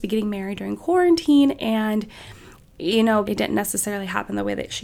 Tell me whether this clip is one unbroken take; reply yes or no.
no